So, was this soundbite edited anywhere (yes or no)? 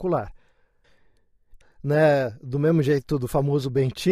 yes